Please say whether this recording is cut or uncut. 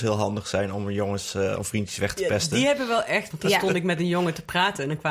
cut